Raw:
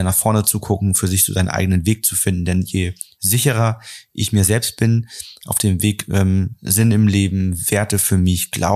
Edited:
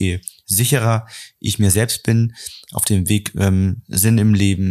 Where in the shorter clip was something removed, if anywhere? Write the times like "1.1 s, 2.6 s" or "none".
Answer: none